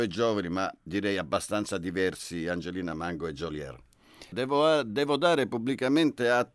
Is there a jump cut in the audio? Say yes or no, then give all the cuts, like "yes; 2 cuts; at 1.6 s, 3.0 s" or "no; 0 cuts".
yes; 1 cut; at 4.3 s